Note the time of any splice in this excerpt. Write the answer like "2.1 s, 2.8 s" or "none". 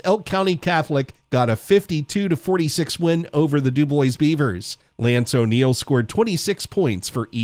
none